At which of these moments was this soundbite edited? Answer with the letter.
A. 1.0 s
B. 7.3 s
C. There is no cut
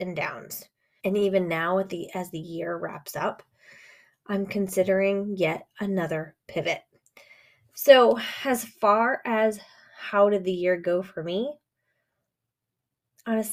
A